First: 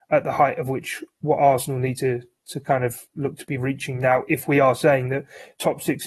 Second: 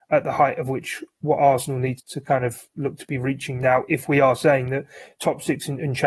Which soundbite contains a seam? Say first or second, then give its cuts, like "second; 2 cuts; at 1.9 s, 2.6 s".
second; 1 cut; at 2.0 s